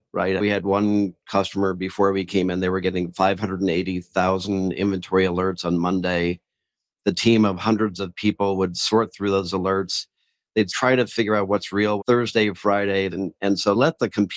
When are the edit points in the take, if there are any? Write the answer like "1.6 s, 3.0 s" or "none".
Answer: 12.0 s, 13.1 s